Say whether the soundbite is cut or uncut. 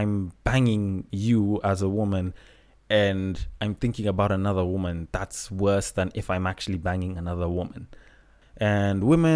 cut